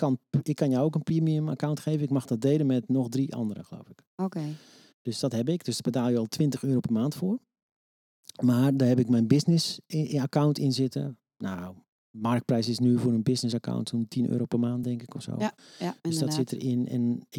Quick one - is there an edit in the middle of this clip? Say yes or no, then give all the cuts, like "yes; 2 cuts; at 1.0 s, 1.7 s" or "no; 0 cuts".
no; 0 cuts